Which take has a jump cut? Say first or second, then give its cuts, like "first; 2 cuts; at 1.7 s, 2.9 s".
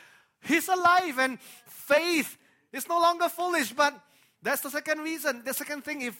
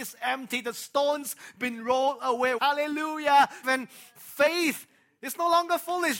second; 2 cuts; at 2.6 s, 3.6 s